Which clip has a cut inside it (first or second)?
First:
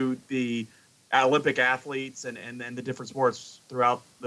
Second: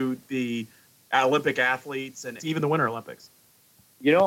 second